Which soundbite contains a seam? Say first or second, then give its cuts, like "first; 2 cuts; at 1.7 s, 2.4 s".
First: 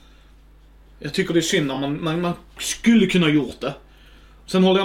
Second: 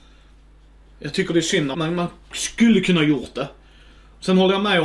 second; 1 cut; at 1.7 s